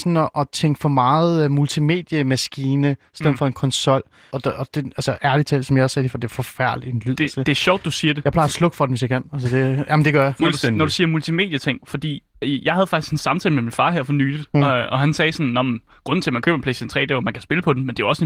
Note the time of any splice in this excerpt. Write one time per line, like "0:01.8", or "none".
0:04.3

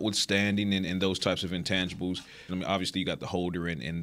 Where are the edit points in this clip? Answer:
0:02.5

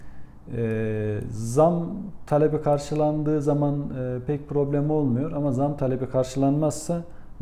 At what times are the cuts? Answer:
none

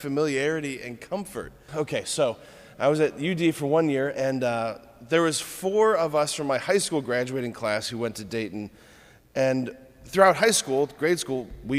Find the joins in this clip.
0:01.7

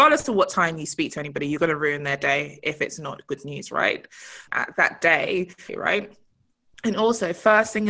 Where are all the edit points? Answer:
0:04.5
0:05.7

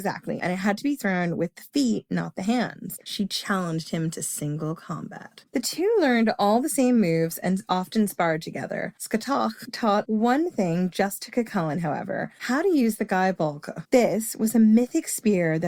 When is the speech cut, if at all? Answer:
0:03.0
0:05.4

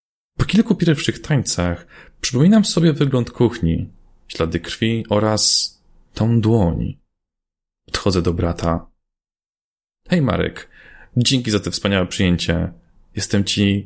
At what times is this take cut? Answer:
none

